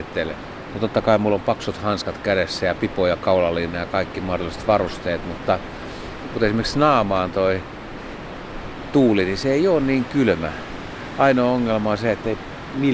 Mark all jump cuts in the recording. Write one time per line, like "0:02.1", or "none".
none